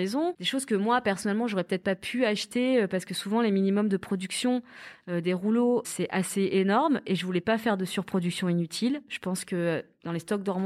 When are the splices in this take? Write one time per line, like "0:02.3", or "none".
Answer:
0:05.8